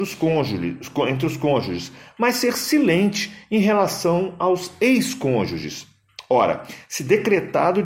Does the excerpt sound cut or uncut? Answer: uncut